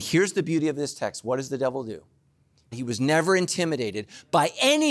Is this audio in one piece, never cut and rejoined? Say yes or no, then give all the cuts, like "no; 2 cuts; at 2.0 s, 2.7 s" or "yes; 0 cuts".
no; 1 cut; at 2.7 s